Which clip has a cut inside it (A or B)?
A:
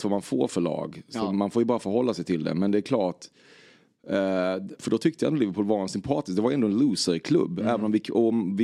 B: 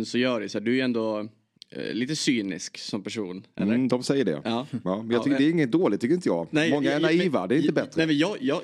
A